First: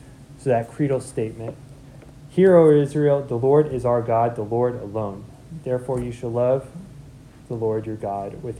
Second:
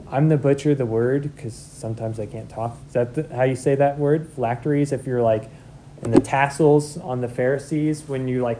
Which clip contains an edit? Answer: second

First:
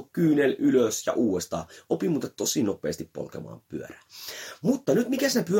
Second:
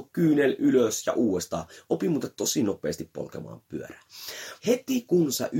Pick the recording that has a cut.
second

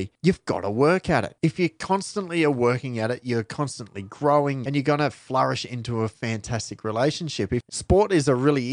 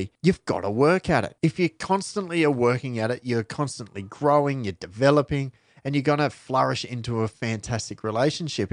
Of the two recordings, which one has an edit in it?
first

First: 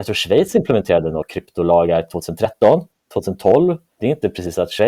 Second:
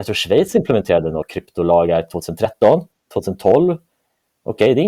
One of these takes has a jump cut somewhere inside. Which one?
first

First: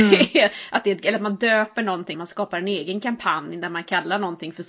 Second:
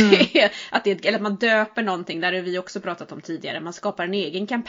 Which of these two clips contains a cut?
first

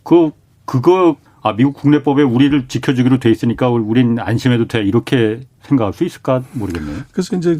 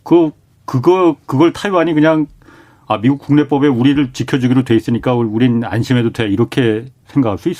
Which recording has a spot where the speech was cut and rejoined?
first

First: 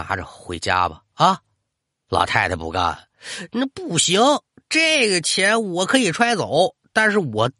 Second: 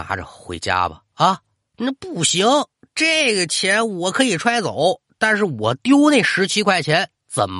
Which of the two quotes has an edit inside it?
second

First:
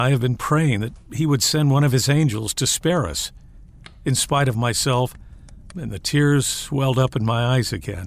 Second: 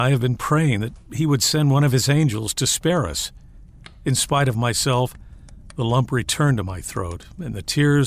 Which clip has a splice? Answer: first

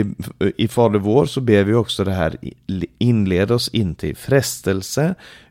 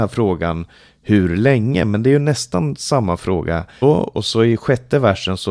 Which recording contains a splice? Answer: second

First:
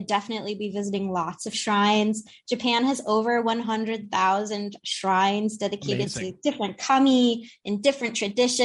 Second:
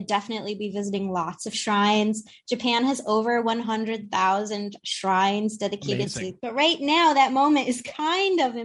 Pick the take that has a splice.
second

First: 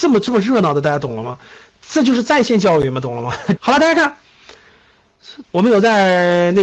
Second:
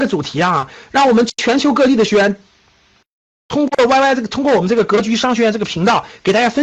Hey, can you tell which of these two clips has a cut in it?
first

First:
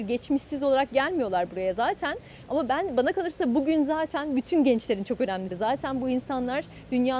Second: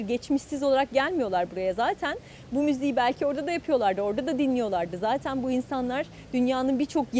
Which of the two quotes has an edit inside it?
first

